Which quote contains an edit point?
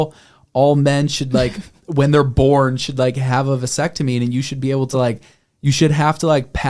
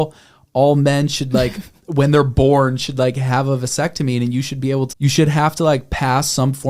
second; 1 cut; at 4.9 s

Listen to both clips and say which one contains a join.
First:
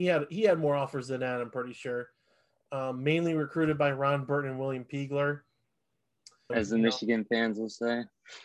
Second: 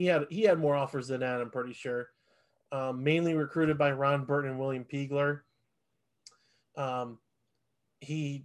first; 1 cut; at 6.5 s

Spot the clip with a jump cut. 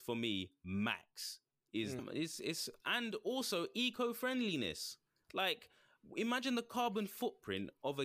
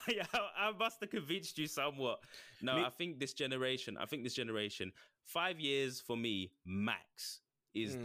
first; 1 cut; at 2.0 s

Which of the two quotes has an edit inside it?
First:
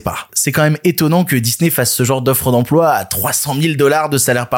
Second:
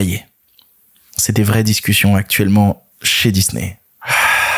second; 1 cut; at 2.9 s

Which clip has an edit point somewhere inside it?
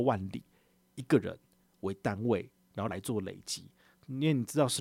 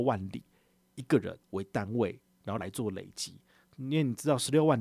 second; 1 cut; at 1.4 s

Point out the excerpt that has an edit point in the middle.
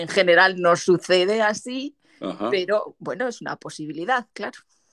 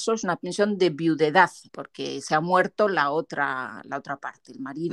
second; 1 cut; at 1.7 s

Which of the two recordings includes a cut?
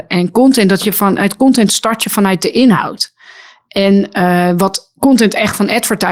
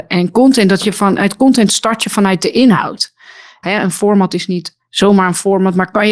second; 1 cut; at 3.6 s

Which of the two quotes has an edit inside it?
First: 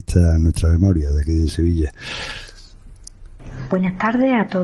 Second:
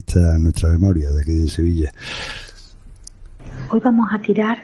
second; 1 cut; at 3.7 s

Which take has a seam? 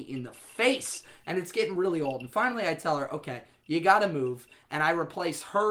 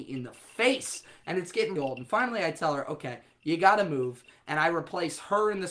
second; 1 cut; at 1.8 s

